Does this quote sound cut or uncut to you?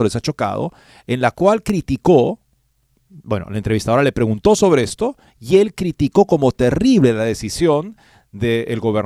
uncut